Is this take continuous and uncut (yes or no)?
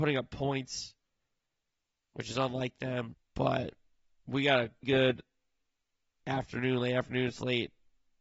no